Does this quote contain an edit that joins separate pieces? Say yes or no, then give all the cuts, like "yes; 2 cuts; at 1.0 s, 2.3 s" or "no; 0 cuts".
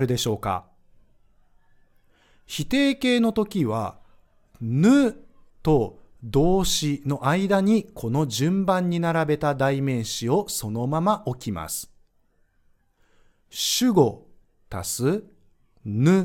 no; 0 cuts